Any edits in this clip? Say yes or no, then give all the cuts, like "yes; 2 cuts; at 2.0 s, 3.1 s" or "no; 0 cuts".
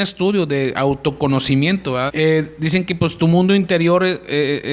yes; 1 cut; at 2.1 s